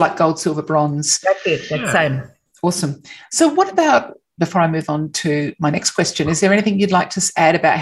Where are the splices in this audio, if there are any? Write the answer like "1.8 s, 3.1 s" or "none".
2.5 s, 4.4 s

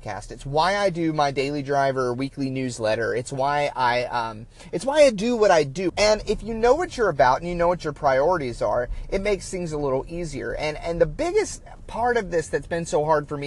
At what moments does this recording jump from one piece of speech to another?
5.9 s

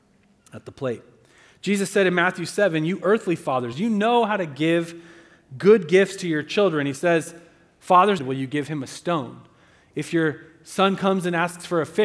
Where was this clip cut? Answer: 3.7 s, 8.2 s

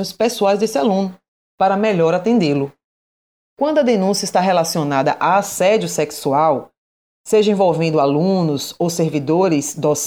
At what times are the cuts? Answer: 3.5 s

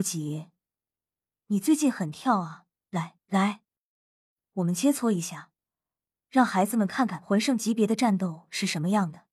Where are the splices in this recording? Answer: 3.2 s

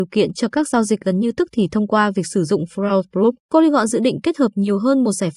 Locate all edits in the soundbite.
3.4 s

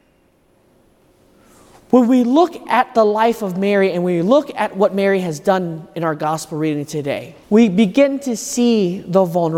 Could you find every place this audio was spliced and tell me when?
7.4 s

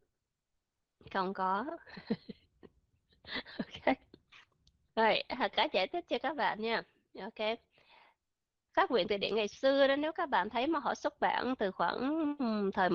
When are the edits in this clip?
8.7 s

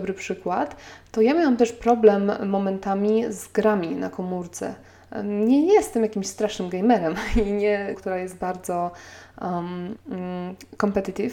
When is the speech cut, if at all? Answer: 7.9 s, 9.9 s

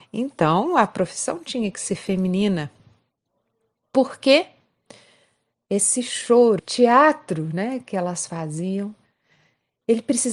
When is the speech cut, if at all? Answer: 6.6 s

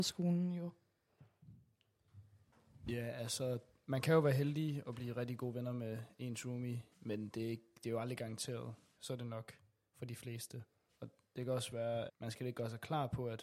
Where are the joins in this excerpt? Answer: 9.0 s, 10.9 s, 12.1 s

